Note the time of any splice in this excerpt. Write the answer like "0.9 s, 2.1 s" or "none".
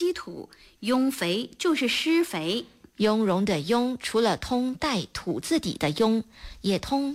none